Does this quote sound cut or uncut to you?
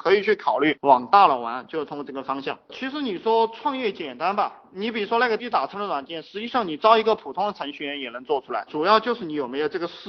cut